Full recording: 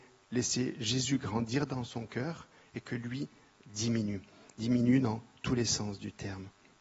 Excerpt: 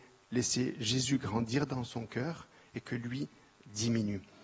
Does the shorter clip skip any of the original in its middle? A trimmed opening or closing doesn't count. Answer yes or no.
no